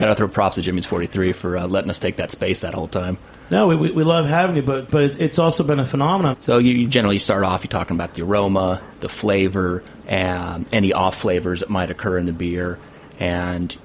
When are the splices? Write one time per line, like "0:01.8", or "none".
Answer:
0:06.3
0:08.9
0:10.0